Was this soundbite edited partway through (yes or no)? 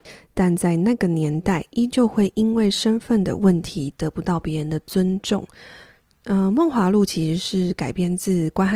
no